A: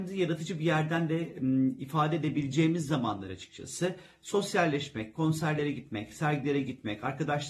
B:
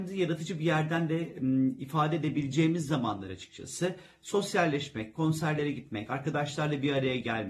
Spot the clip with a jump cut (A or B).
B